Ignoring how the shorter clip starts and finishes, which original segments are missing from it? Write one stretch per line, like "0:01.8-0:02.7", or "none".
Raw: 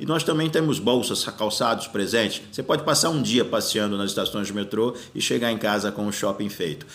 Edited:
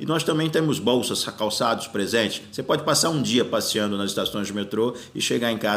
none